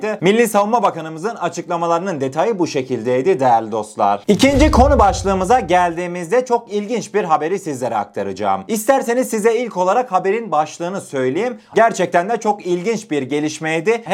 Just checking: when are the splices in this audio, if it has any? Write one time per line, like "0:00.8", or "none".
0:11.7